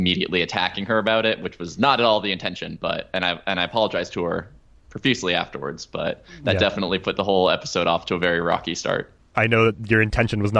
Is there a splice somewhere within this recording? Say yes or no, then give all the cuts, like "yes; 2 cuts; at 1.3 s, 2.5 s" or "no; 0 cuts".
no; 0 cuts